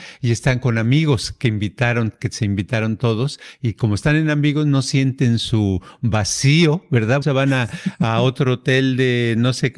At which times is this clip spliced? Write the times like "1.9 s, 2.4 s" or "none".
7.2 s